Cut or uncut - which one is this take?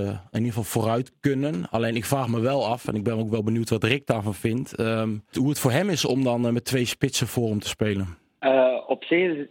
uncut